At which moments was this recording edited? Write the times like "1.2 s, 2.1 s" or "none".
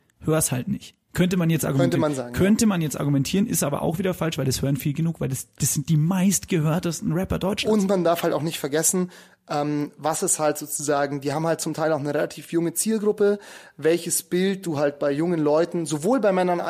none

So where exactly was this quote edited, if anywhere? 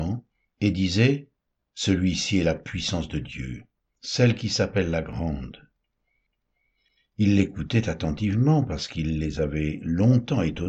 none

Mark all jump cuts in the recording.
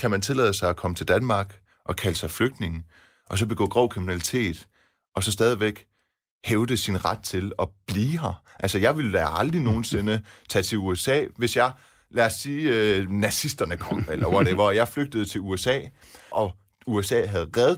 16.3 s

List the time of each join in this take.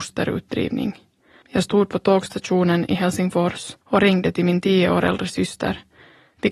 1.4 s, 3.8 s

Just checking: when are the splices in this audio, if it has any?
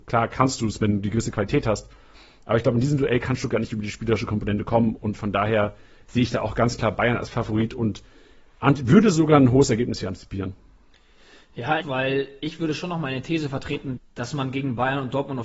11.8 s, 14.0 s

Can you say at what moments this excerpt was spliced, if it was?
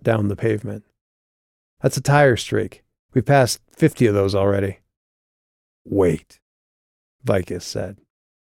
none

